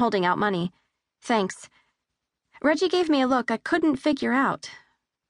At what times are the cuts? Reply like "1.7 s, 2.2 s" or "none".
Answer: none